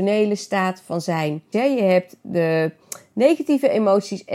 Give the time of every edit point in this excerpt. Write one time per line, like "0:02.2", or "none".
0:01.5